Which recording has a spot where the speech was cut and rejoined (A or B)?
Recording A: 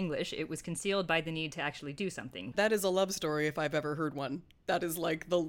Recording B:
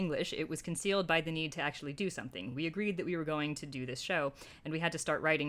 A